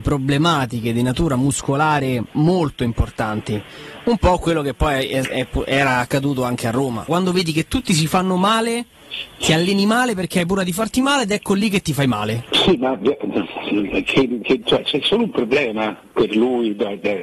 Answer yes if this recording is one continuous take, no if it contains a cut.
no